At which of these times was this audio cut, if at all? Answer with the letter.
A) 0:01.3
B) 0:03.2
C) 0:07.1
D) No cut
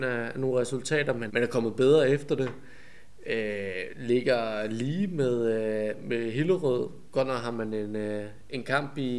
A